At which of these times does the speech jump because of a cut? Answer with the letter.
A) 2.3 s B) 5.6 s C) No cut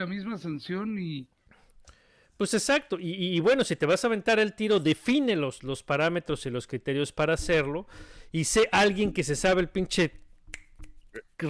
B